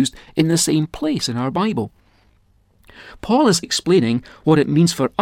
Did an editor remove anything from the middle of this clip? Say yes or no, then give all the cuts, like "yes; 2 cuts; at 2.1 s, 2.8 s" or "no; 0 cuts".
yes; 1 cut; at 3.6 s